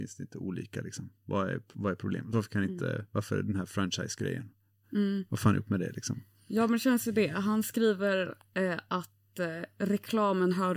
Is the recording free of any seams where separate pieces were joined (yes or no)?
yes